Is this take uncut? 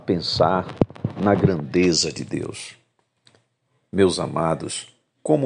yes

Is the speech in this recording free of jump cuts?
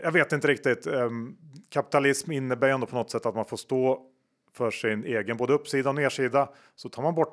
yes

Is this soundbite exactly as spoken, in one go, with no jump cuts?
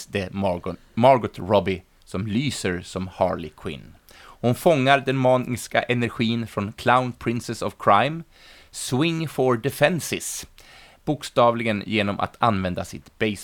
yes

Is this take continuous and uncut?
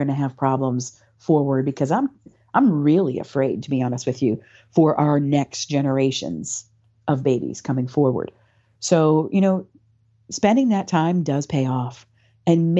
yes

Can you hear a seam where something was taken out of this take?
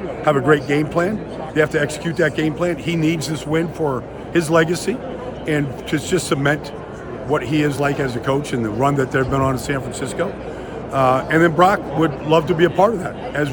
no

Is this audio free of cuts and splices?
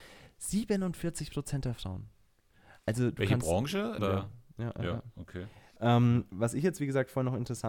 no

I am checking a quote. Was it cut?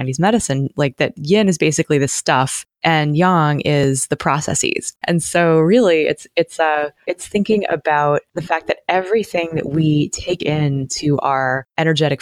yes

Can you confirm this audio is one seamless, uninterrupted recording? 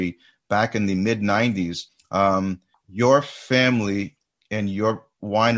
yes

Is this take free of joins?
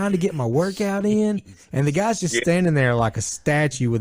yes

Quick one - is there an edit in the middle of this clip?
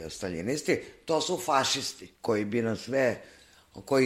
yes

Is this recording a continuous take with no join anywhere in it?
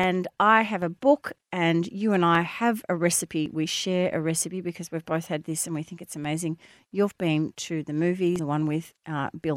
no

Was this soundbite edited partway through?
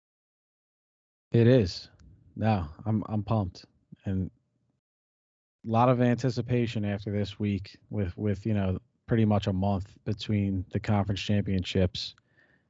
no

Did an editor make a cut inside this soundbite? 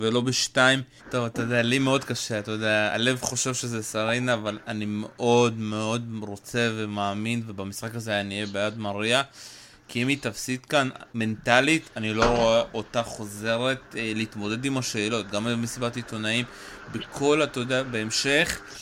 yes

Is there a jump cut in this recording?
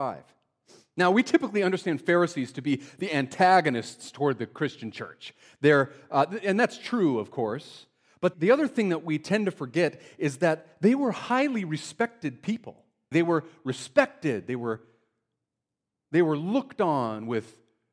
yes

